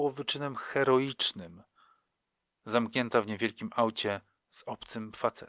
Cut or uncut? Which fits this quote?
uncut